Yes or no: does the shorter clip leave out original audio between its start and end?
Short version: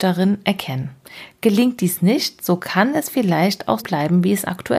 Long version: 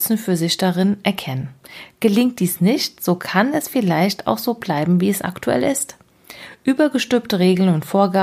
yes